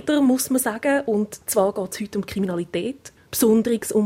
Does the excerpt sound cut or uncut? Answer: cut